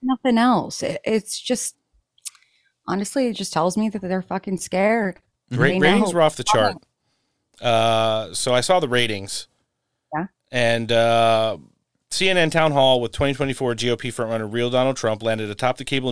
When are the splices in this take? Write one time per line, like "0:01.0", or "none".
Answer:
none